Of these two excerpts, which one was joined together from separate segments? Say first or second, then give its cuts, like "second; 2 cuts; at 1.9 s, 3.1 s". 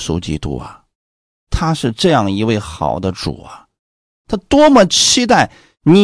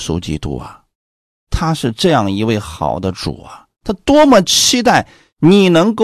second; 1 cut; at 3.7 s